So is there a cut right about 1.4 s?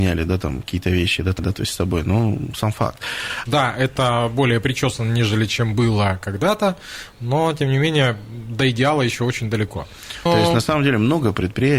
yes; 3 cuts; at 1.4 s, 3.5 s, 10.3 s

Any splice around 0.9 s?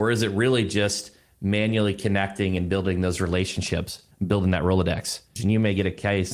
no; 1 cut; at 5.4 s

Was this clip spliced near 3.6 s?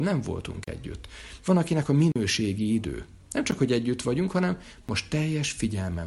no; 1 cut; at 1.4 s

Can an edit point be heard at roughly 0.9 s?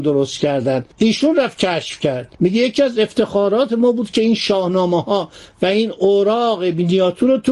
yes; 2 cuts; at 0.9 s, 2.3 s

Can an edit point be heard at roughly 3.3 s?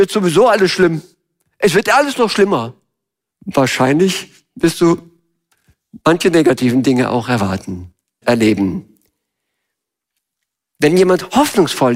yes; 2 cuts; at 3.3 s, 8.2 s

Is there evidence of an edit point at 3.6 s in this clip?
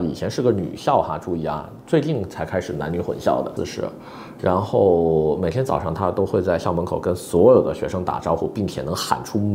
yes; 1 cut; at 3.6 s

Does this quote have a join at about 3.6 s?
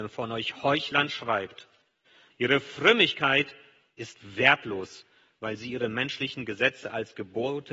no; 1 cut; at 2.3 s

